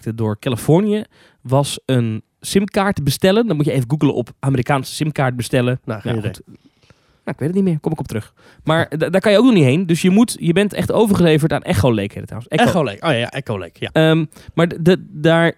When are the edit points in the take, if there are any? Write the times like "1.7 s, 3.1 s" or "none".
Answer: 5.8 s, 13.9 s